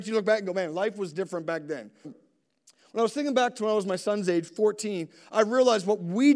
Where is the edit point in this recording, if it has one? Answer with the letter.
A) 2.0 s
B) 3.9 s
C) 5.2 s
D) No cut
A